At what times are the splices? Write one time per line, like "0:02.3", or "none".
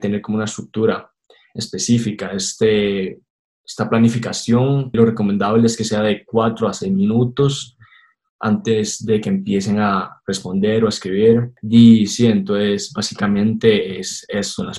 0:04.9

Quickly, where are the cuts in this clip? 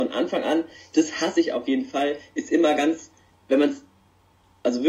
none

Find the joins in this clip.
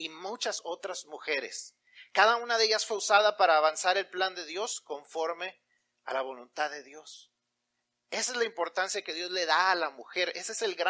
none

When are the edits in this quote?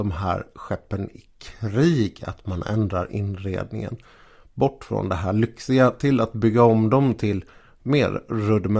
none

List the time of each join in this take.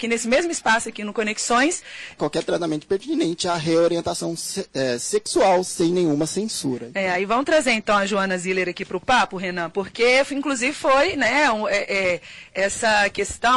0:02.2

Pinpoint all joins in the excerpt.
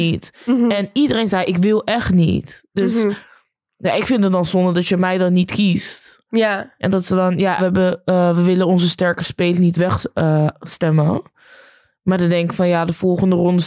0:07.6

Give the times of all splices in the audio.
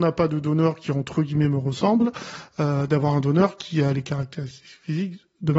none

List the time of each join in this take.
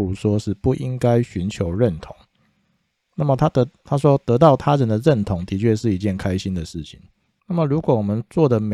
0:07.4

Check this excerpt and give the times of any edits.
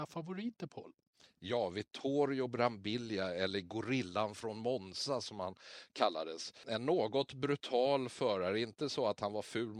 none

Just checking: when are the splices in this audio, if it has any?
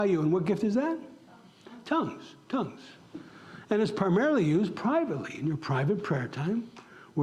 none

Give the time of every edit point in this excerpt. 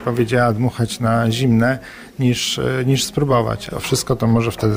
0:03.7

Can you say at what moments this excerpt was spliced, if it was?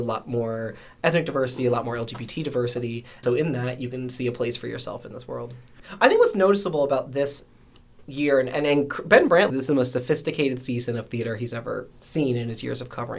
0:03.2
0:09.5

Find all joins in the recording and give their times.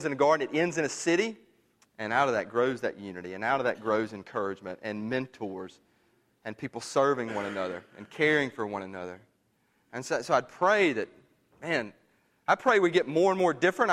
0:01.8

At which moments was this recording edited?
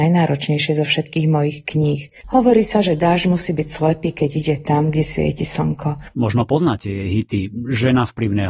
0:02.2
0:06.1

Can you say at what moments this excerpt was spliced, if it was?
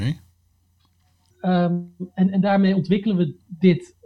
0:01.3

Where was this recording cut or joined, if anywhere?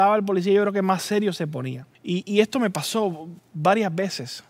0:02.0

